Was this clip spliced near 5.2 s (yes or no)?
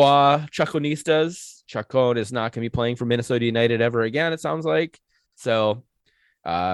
no